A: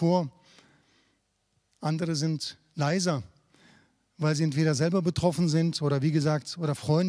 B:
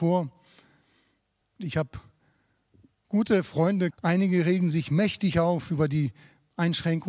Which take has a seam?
B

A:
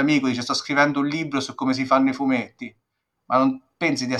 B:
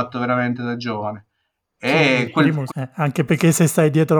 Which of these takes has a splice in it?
B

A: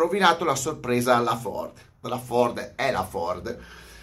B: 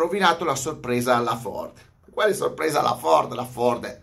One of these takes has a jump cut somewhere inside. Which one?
A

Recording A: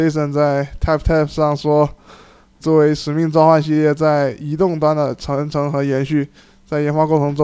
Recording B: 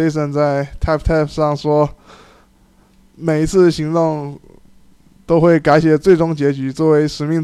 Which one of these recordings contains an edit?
A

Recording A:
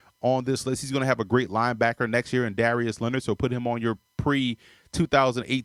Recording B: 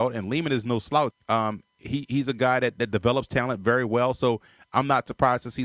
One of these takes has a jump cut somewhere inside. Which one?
B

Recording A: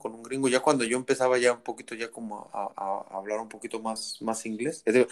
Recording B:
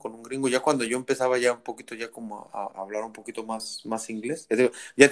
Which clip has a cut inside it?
B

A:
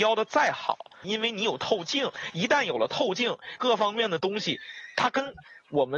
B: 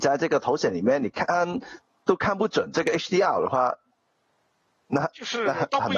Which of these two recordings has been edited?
A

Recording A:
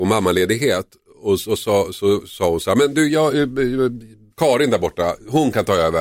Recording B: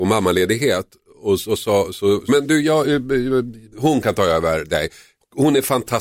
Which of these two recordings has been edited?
B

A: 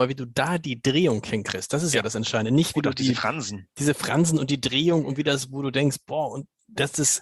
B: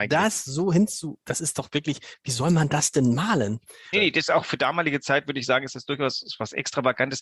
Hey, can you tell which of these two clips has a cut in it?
B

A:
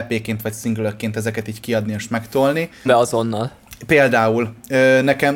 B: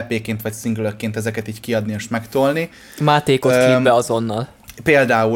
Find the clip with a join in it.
A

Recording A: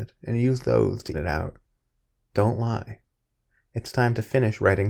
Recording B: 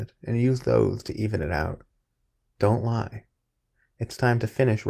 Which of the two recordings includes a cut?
A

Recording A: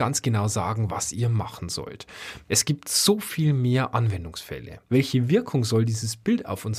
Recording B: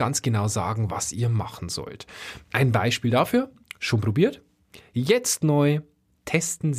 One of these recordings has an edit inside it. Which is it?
A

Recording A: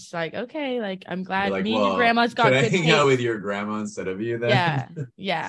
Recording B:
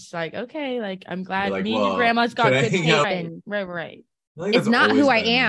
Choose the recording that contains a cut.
B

